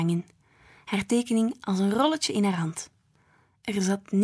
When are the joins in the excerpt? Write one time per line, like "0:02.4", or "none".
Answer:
none